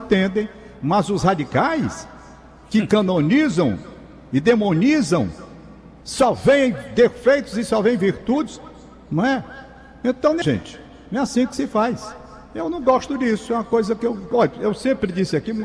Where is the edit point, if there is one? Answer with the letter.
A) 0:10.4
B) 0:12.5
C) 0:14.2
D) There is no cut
A